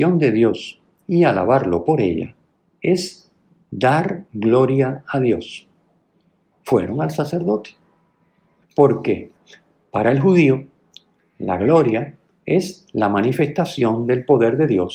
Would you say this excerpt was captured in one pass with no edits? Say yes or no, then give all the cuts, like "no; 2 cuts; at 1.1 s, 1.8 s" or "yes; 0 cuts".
no; 2 cuts; at 6.5 s, 8.6 s